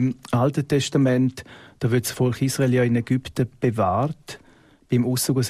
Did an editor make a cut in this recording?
no; 0 cuts

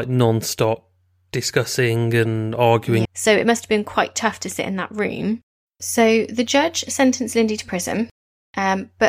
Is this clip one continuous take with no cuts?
no; 2 cuts; at 3.0 s, 5.7 s

